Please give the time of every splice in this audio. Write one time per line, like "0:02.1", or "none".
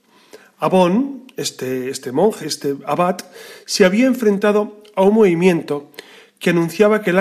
0:02.4